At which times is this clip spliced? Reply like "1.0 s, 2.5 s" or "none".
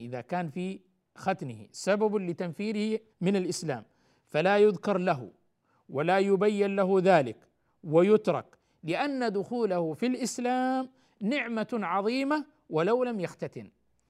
3.1 s